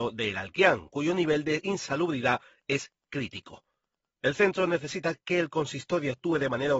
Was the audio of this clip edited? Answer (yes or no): no